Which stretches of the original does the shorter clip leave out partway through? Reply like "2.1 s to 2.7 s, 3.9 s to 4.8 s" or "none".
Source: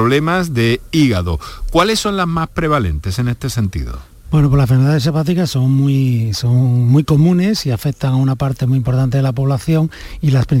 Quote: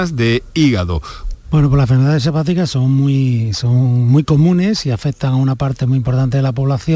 1.7 s to 4.1 s